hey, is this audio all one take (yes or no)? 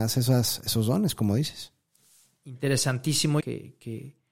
no